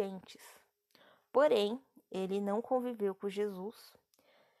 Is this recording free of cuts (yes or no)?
yes